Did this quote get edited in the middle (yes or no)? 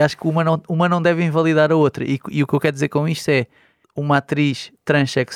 yes